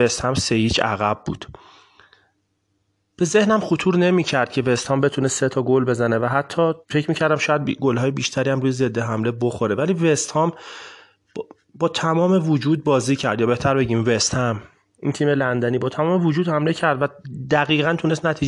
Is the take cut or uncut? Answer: cut